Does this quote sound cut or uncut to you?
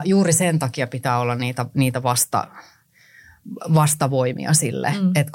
uncut